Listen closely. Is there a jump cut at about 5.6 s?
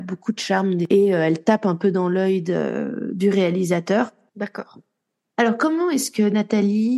no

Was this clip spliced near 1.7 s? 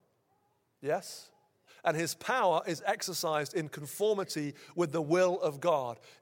yes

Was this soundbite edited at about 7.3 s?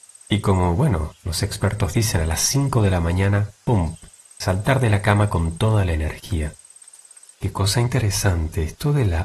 yes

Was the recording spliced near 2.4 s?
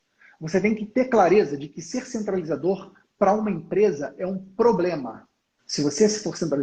no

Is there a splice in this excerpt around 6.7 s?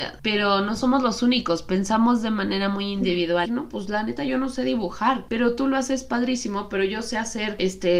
no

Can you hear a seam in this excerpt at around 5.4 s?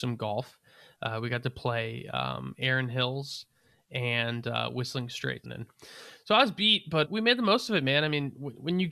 yes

